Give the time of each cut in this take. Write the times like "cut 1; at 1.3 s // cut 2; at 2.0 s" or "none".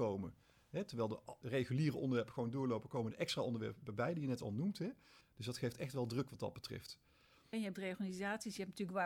cut 1; at 1.4 s // cut 2; at 5.2 s // cut 3; at 7.5 s